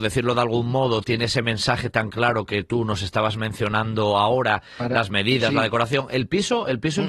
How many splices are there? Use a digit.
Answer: 0